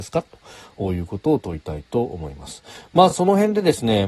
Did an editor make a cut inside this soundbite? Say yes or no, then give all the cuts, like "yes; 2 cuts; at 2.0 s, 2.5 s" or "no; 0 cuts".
no; 0 cuts